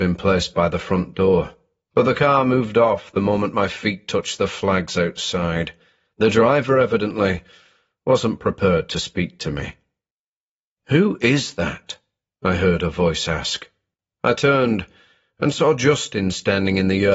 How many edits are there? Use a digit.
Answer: 1